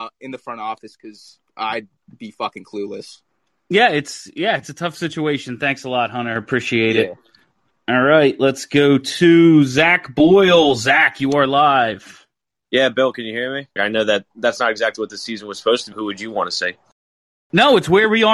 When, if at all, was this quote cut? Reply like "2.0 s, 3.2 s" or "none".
13.8 s, 15.9 s